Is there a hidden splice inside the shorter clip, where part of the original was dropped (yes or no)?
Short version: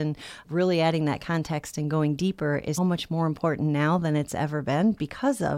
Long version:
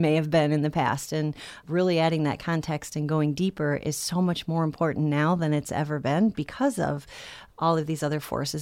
yes